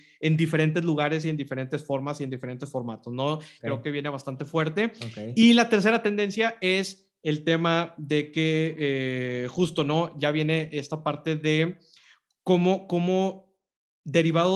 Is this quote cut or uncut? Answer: cut